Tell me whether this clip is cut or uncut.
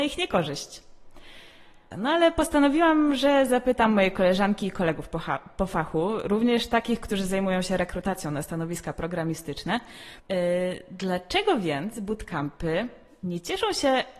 cut